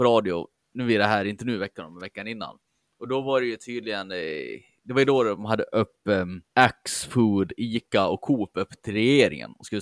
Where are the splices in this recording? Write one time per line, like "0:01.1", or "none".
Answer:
0:06.5